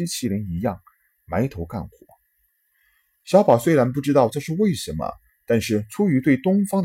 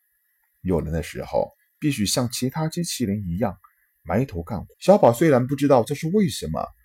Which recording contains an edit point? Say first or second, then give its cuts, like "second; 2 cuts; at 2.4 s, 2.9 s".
second; 1 cut; at 4.7 s